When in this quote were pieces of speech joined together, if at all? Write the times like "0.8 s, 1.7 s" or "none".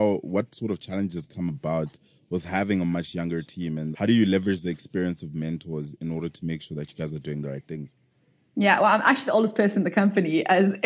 3.9 s